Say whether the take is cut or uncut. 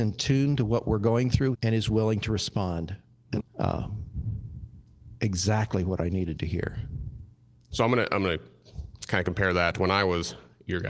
cut